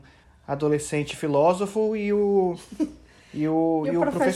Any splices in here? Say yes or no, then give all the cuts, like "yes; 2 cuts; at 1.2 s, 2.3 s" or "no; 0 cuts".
no; 0 cuts